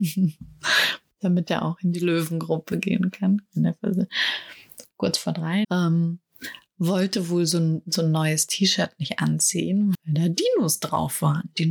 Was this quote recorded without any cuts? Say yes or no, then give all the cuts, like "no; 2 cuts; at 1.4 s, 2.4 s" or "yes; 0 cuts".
no; 3 cuts; at 3.5 s, 5.6 s, 9.9 s